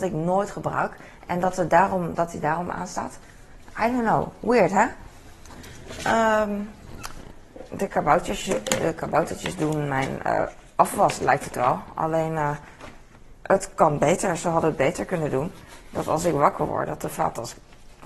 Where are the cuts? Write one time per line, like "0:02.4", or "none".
none